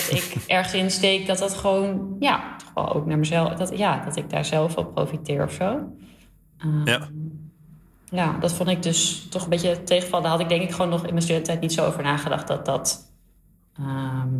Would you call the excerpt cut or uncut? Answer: uncut